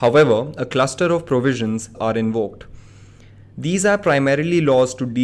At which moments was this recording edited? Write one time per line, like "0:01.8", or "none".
0:01.9